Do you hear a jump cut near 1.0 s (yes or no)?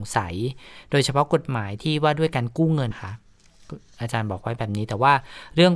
no